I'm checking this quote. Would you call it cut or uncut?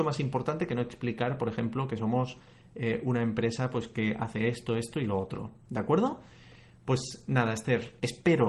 uncut